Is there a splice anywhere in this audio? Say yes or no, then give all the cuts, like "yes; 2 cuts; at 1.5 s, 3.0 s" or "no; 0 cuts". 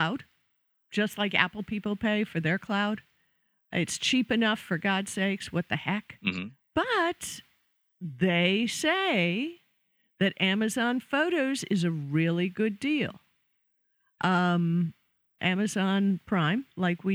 yes; 1 cut; at 15.4 s